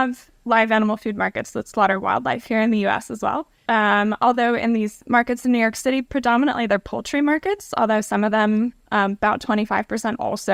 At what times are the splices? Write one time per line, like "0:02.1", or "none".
0:03.7